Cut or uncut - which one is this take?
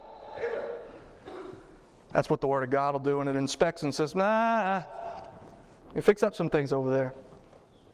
uncut